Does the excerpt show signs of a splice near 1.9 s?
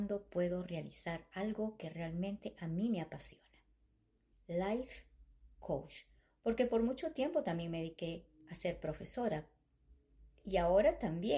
no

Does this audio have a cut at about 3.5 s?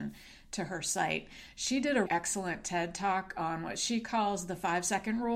no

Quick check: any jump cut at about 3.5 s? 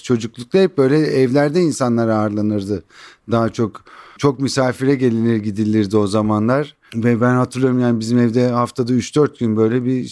no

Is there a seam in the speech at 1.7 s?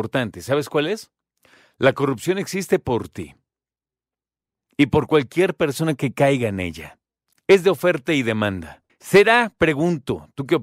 no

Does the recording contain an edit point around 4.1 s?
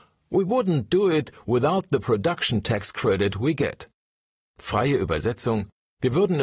no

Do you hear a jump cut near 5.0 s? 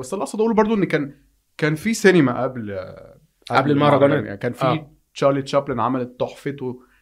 no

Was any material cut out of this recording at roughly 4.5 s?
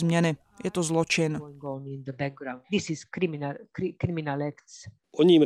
no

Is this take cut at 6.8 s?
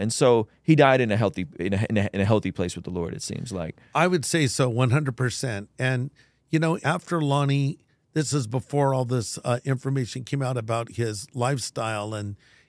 yes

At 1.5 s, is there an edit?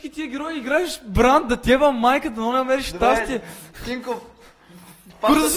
no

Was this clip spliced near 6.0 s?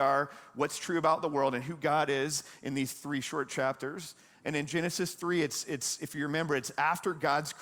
no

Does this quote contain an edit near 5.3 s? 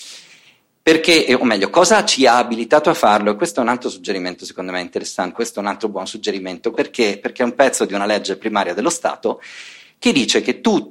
yes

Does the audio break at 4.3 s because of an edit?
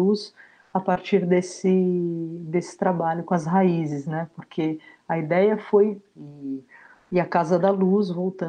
no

